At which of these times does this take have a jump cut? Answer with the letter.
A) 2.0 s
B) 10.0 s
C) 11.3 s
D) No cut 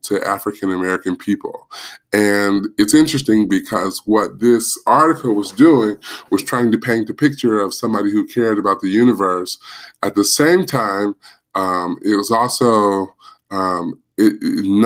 D